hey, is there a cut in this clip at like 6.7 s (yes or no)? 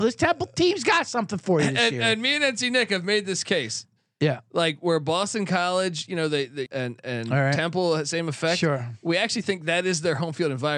yes